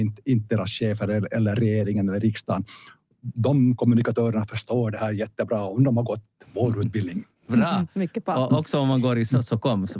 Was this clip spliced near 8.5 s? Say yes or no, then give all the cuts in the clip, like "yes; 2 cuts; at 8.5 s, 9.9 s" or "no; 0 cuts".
no; 0 cuts